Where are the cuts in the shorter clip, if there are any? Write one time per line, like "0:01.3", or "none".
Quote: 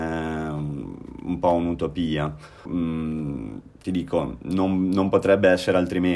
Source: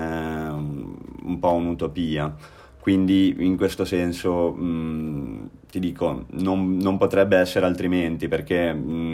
0:02.7